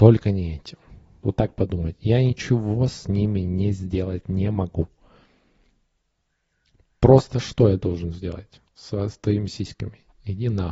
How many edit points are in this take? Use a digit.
1